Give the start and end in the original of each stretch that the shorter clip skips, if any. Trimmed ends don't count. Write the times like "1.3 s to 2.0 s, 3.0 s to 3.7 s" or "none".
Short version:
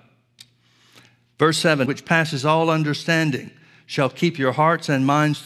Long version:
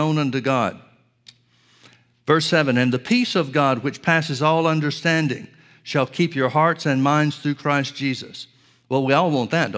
2.7 s to 3.8 s